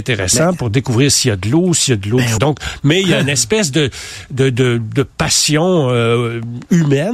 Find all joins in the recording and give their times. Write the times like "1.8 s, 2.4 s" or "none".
2.4 s